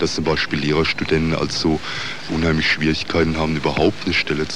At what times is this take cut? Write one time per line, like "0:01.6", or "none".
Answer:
0:02.3